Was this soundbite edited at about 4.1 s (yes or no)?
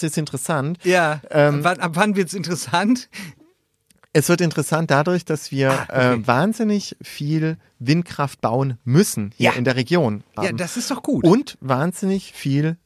no